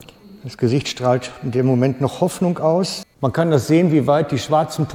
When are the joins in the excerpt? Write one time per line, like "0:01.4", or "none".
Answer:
0:03.0